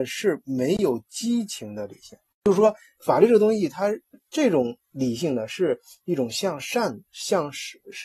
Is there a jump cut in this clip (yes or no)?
yes